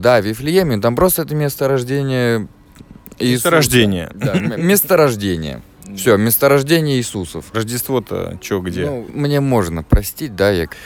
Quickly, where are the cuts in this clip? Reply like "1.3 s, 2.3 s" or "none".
7.5 s, 9.1 s